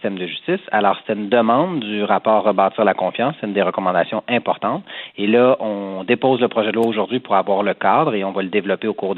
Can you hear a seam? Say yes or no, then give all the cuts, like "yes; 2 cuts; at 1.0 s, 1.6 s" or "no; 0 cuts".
no; 0 cuts